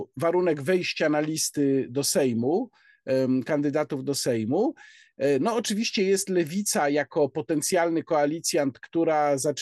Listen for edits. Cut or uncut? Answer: uncut